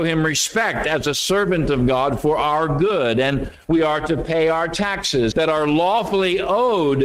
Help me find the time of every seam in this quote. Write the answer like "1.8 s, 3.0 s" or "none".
5.3 s